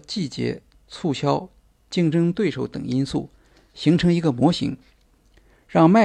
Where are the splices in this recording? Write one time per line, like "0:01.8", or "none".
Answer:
none